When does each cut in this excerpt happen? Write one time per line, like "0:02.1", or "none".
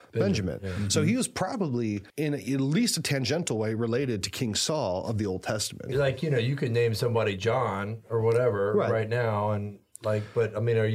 0:02.1
0:05.9